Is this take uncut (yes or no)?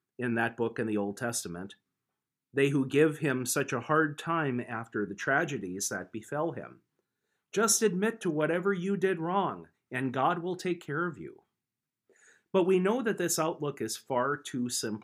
no